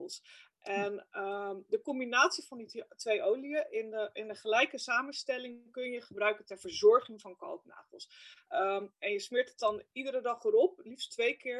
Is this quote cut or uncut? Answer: uncut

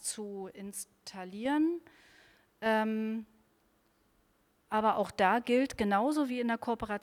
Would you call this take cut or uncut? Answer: uncut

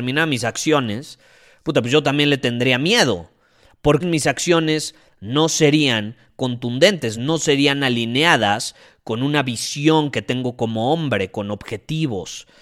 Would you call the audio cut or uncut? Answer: cut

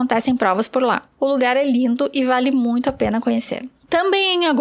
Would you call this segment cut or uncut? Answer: uncut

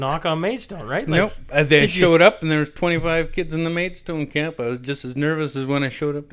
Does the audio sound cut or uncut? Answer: uncut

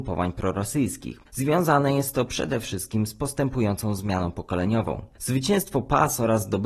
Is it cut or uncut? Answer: uncut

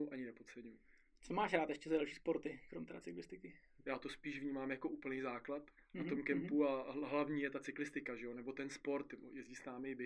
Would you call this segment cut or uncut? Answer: cut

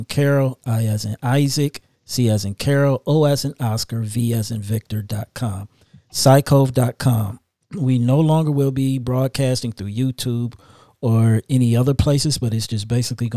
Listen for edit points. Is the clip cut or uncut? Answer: uncut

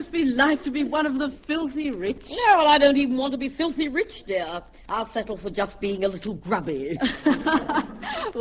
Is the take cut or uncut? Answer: uncut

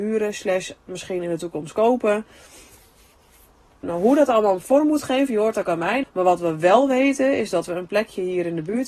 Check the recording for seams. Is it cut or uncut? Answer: cut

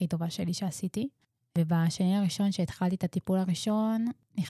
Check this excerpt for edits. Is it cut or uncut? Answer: uncut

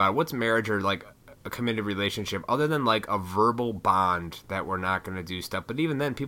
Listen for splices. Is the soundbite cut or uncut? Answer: uncut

